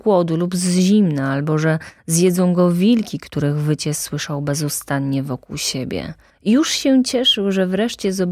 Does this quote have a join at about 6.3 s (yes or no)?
yes